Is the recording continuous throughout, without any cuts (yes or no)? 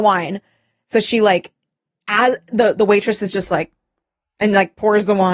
yes